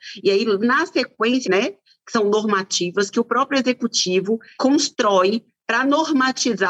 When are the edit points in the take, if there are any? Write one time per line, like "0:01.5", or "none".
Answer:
0:01.4